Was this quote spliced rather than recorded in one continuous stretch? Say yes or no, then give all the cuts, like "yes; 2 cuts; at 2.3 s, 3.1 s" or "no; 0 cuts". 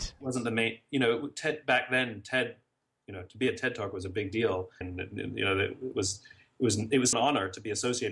yes; 2 cuts; at 4.8 s, 7.1 s